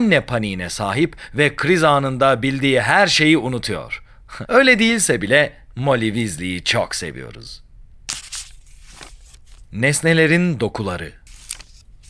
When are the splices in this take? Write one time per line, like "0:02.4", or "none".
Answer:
0:04.4